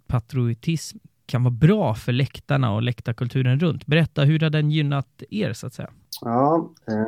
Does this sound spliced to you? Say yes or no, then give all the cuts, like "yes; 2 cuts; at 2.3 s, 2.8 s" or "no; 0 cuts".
yes; 1 cut; at 1.1 s